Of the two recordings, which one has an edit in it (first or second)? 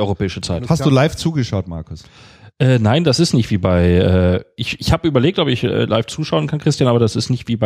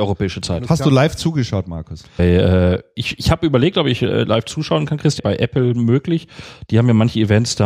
second